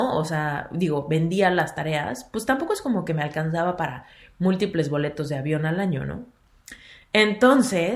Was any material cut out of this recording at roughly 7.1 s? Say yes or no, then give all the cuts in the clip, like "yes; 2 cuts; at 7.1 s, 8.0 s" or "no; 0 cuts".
no; 0 cuts